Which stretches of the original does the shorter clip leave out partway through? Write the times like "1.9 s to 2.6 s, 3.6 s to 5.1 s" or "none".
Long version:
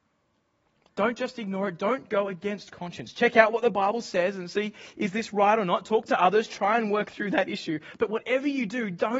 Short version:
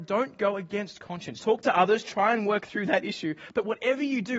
3.1 s to 5.8 s